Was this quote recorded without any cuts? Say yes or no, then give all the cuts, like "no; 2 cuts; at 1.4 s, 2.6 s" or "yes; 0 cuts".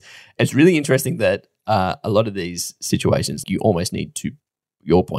no; 1 cut; at 3.4 s